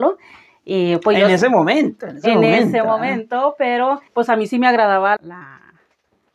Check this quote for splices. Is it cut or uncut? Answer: cut